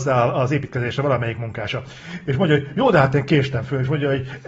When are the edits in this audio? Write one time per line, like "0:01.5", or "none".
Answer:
none